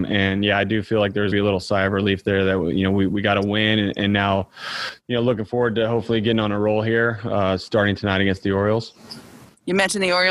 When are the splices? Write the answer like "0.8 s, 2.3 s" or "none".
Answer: 1.3 s